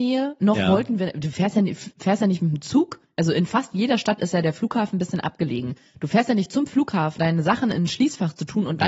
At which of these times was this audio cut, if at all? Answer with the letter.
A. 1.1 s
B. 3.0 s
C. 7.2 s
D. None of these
C